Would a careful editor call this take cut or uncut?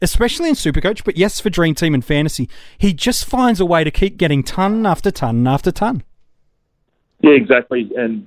uncut